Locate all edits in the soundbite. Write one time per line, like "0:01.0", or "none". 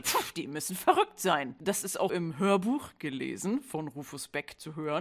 0:02.1